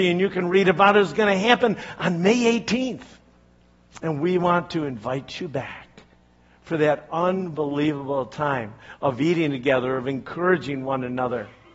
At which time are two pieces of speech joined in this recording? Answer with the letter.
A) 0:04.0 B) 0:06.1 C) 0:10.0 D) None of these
D